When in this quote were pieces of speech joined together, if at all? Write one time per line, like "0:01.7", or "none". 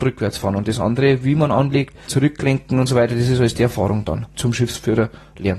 0:02.1
0:04.3